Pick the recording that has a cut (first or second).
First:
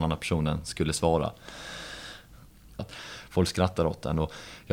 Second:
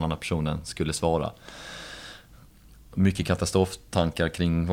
first